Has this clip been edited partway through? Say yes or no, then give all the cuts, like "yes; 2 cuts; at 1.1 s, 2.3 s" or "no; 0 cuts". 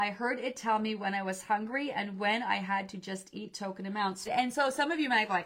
yes; 1 cut; at 4.3 s